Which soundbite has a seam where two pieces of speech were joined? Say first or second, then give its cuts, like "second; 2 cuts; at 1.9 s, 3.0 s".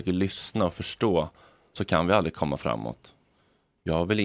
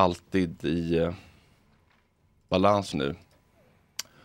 second; 1 cut; at 2.9 s